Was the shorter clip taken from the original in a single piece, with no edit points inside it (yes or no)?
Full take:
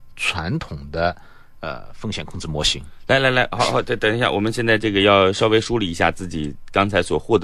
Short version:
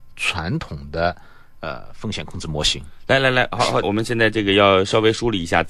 no